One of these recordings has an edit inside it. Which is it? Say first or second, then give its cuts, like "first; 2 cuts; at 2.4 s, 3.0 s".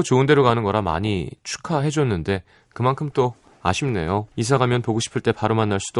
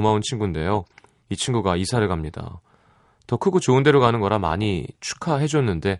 first; 1 cut; at 4.3 s